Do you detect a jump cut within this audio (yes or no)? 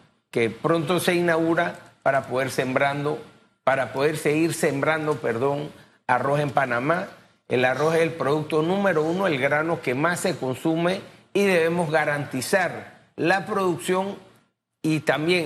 no